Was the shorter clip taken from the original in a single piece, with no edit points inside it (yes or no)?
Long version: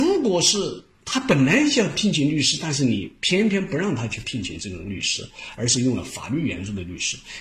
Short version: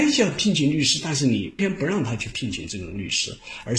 no